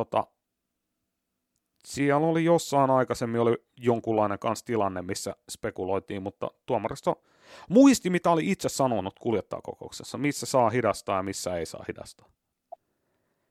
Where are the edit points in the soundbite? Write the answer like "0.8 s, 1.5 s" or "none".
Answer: none